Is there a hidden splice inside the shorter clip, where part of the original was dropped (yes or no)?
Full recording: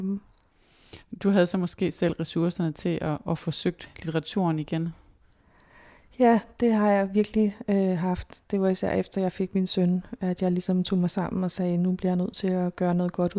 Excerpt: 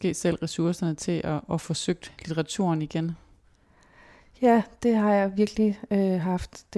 no